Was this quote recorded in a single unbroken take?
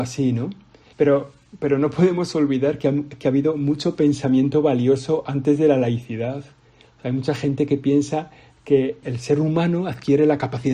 no; 2 cuts; at 0.9 s, 9.0 s

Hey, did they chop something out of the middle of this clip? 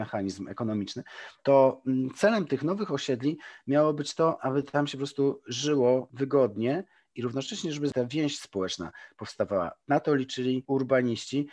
yes; 1 cut; at 4.4 s

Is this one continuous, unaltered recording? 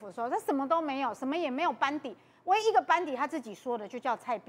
no; 1 cut; at 2.6 s

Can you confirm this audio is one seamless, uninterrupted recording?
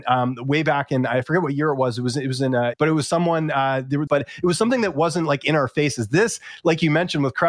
no; 2 cuts; at 2.7 s, 4.1 s

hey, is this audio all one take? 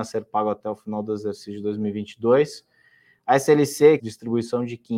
no; 1 cut; at 4.0 s

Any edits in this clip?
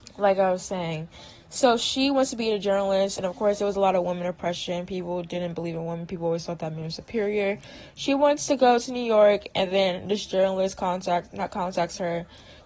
no; 0 cuts

